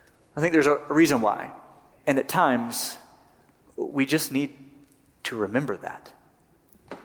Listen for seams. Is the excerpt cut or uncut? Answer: cut